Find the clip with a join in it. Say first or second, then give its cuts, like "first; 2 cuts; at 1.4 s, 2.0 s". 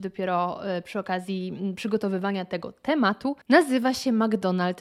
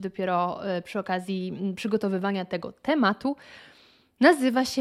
first; 1 cut; at 3.4 s